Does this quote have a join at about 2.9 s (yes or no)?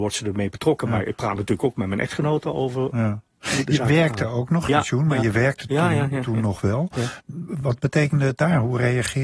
no